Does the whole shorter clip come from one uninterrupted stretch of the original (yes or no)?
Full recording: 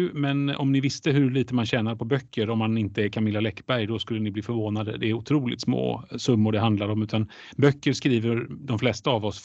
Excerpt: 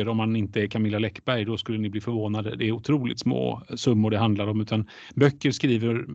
yes